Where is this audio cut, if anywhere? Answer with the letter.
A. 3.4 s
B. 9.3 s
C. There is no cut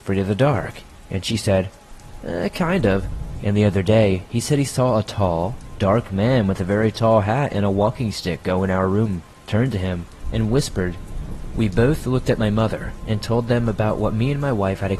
A